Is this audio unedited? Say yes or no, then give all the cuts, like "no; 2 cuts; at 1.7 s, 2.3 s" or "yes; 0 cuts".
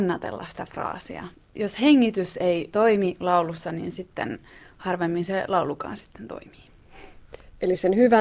yes; 0 cuts